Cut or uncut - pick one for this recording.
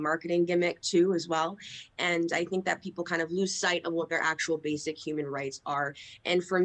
uncut